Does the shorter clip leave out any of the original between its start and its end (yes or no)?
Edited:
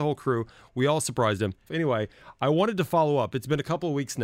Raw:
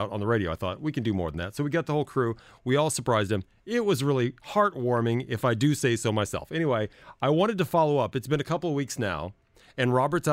yes